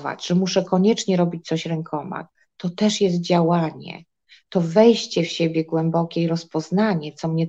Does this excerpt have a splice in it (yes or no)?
no